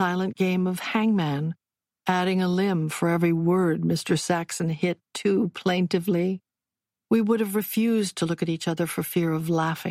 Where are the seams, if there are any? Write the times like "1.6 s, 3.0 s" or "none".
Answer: none